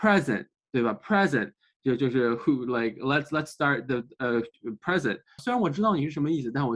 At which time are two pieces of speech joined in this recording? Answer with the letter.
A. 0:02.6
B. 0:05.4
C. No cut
B